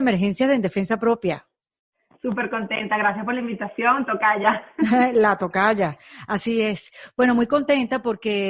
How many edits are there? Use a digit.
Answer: 0